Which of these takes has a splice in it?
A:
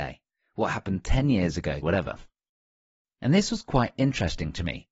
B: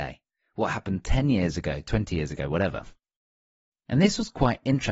A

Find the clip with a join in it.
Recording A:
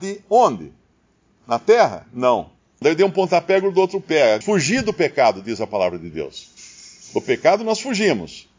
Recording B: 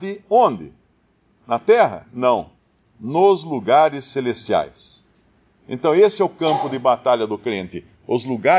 A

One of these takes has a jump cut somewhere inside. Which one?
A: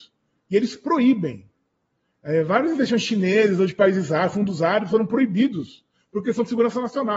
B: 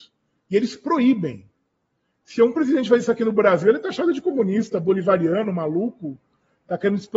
B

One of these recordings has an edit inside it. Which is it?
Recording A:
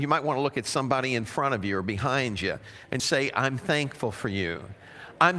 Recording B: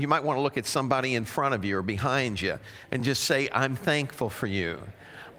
A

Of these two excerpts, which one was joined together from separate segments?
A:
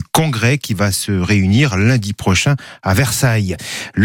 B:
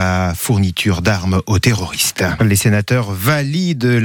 B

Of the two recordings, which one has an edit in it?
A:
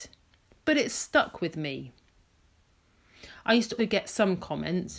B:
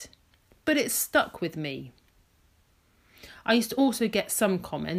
A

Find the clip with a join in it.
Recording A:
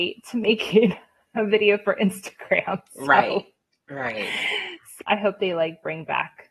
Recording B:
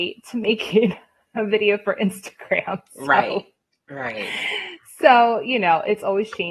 A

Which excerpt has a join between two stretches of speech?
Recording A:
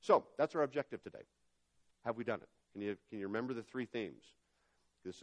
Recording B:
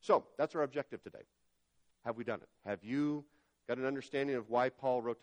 A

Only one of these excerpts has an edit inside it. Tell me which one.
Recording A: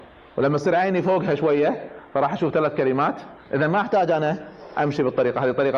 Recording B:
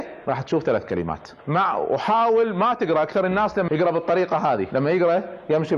B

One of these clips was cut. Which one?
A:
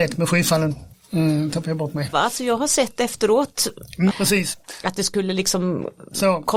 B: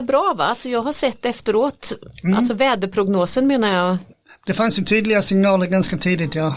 A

